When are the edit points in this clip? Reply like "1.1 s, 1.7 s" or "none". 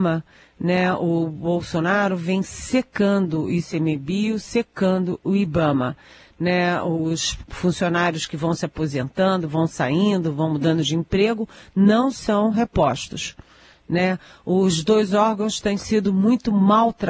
none